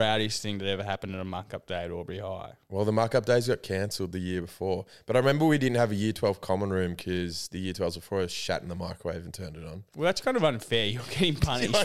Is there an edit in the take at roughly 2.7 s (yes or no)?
no